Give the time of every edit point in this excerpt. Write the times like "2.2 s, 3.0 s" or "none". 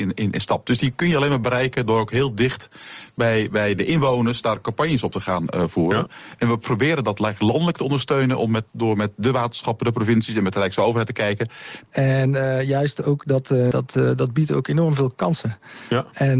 11.8 s, 13.7 s